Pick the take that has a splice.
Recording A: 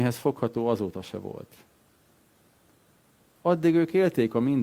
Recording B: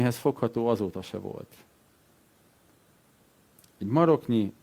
A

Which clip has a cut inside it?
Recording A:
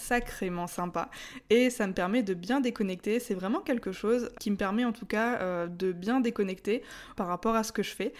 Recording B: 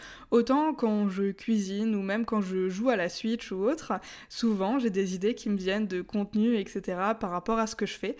A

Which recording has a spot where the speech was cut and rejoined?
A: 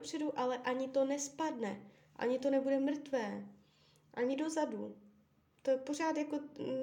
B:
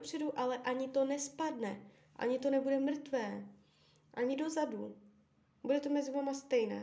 B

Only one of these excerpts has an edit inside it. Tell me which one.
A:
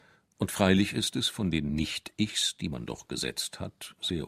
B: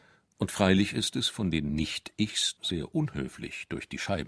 B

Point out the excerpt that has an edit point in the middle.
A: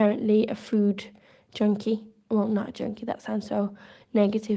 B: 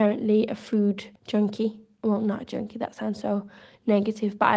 B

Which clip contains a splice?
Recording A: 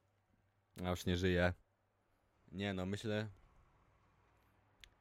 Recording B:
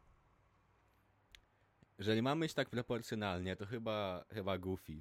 A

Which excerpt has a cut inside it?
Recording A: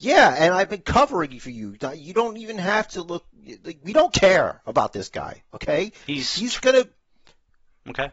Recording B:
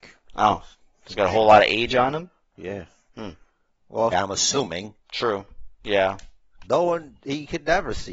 B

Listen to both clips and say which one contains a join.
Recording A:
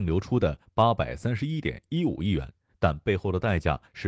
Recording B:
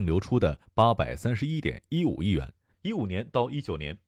B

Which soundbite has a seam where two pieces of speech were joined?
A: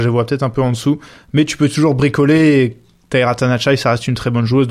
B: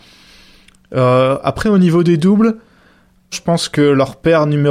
B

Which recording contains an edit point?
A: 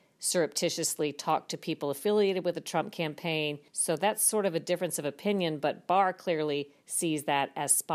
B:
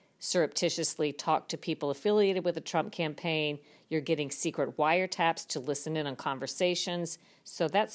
A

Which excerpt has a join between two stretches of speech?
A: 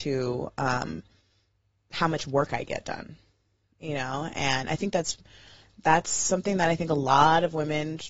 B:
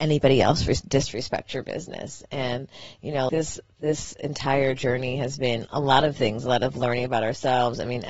B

